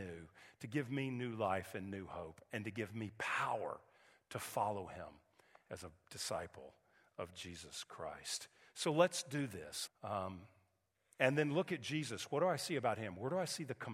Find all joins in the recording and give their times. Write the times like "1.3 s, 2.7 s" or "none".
9.9 s